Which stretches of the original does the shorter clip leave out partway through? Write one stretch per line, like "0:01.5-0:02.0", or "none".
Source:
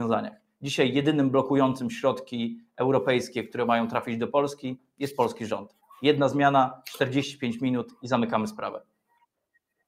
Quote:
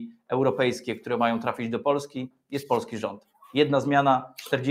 none